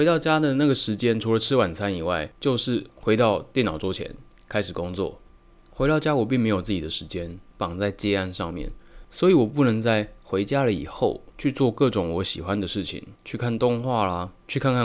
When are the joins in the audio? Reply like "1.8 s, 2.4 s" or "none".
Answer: 7.5 s, 13.2 s